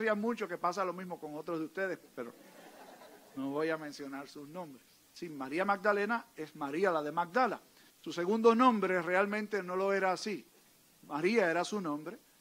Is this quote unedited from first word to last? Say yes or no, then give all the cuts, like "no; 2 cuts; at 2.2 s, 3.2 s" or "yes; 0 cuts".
no; 2 cuts; at 5.1 s, 7.9 s